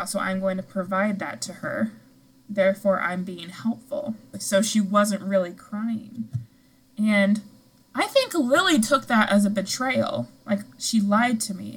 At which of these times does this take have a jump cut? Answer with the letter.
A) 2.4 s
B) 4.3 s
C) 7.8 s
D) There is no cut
B